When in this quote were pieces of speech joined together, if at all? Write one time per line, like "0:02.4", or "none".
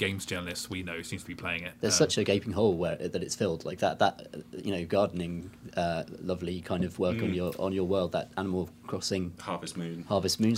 none